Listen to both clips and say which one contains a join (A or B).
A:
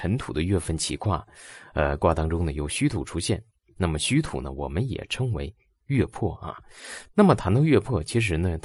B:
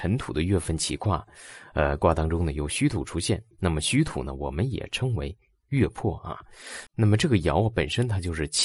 B